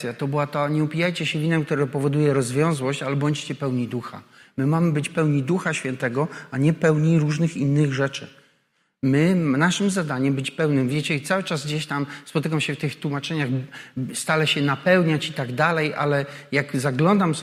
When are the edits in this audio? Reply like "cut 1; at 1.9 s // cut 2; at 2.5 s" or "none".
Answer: none